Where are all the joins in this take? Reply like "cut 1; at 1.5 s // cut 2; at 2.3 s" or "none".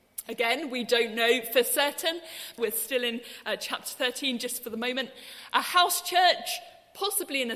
cut 1; at 2.6 s